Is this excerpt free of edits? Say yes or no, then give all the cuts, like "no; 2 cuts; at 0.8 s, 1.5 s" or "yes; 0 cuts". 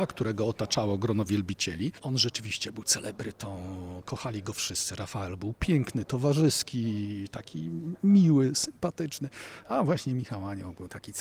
yes; 0 cuts